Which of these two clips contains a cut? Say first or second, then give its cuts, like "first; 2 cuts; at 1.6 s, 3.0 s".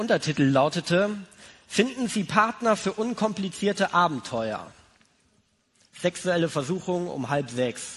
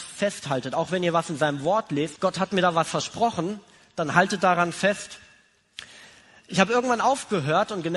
second; 1 cut; at 2.2 s